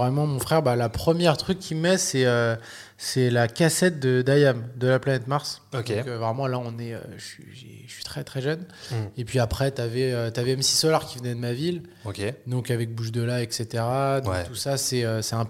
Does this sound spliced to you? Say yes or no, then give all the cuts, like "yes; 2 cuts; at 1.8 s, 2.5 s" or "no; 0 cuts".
no; 0 cuts